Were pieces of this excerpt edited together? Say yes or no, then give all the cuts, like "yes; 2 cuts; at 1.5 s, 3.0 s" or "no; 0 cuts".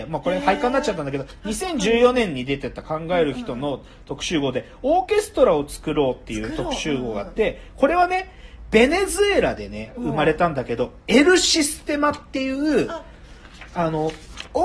no; 0 cuts